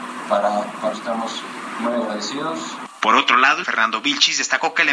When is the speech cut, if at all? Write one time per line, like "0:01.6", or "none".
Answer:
0:00.9
0:03.6